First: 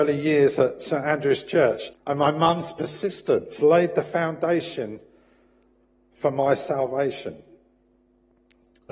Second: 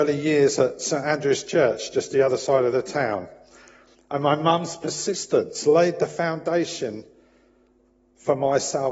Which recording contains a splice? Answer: first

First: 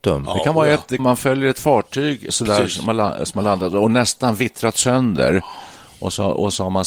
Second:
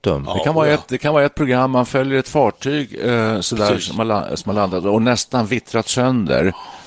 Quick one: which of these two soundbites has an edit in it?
first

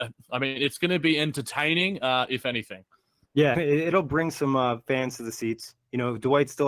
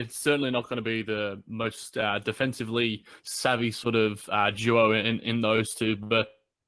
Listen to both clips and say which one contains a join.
first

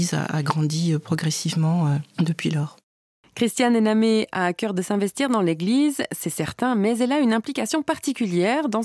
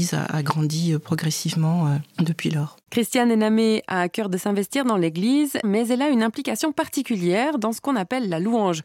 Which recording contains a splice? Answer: second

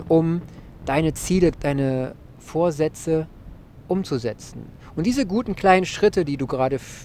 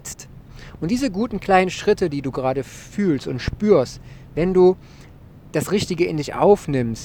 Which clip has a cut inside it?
first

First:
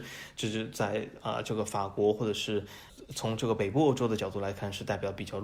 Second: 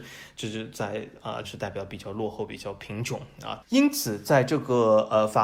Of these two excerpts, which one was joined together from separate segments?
second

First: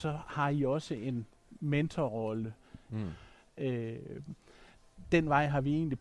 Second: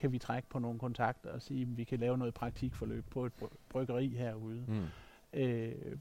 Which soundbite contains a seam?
first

